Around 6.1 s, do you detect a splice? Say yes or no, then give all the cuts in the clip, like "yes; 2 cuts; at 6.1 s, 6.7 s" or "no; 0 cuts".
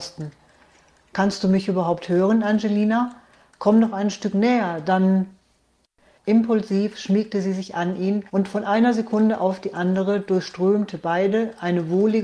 yes; 2 cuts; at 6.1 s, 8.3 s